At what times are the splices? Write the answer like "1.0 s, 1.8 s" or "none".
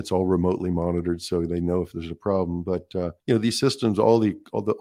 3.2 s